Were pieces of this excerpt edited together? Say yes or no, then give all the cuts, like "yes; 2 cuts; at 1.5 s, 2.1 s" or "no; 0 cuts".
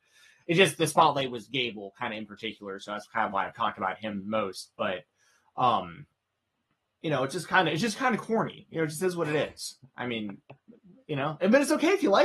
no; 0 cuts